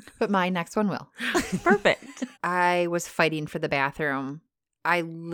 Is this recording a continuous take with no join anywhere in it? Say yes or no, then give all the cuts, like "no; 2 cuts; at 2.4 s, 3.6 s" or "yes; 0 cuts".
no; 1 cut; at 2.4 s